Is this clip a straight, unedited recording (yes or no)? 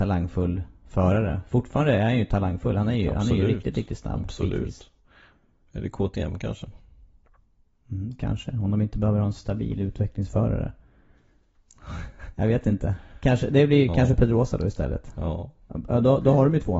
yes